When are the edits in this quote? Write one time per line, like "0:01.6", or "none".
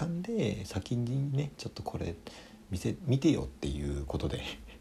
0:03.0

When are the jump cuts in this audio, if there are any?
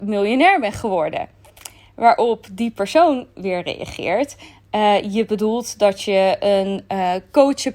none

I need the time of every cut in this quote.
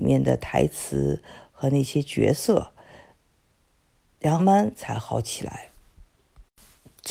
0:04.4

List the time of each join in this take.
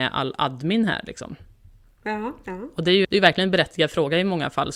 0:03.0

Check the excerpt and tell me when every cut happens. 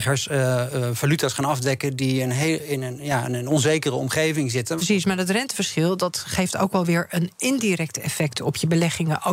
0:04.8

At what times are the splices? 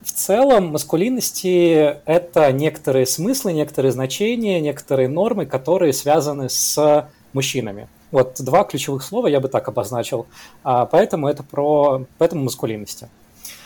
0:08.1

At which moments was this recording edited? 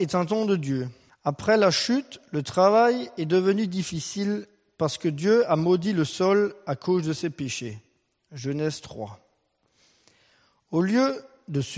0:01.1

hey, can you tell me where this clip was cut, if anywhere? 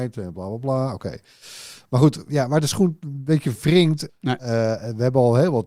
0:04.1

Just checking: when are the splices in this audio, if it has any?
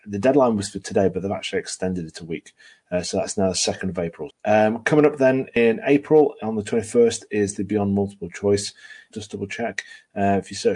0:04.3
0:09.1

